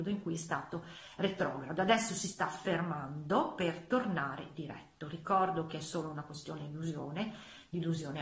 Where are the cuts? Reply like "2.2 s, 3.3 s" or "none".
none

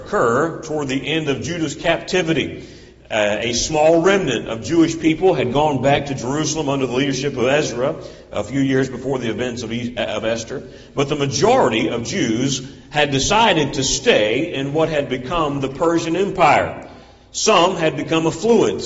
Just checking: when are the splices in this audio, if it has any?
none

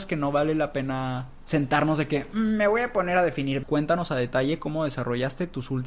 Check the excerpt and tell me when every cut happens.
3.6 s

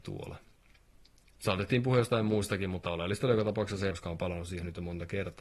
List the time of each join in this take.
1.3 s, 3.9 s

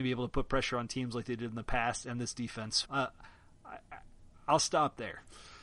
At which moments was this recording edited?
2.8 s

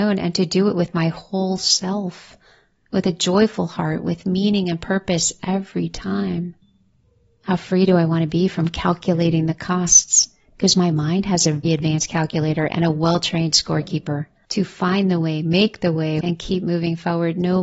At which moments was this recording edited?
11.6 s, 14.5 s, 16.2 s

